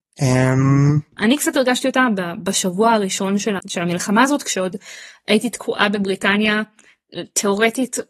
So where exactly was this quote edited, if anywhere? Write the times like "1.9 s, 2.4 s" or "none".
1.2 s, 3.6 s